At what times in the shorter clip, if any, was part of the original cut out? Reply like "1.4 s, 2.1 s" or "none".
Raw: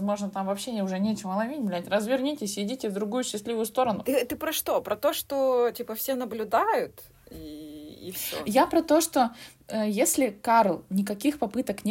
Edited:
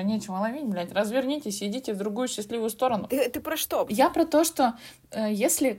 3.9 s